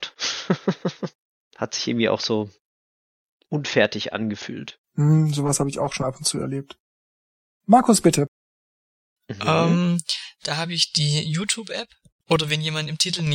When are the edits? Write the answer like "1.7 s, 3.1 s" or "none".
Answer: 12.2 s